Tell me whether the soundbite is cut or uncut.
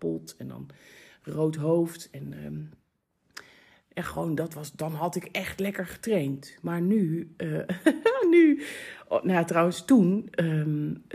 uncut